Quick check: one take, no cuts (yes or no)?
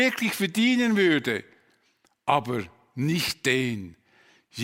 yes